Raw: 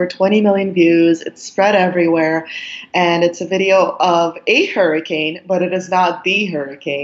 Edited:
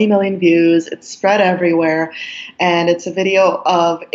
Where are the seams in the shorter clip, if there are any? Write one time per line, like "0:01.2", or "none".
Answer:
none